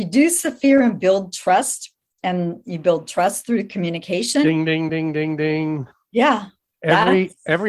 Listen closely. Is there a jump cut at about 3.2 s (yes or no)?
no